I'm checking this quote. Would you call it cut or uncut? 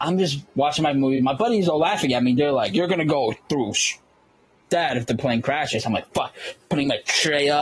uncut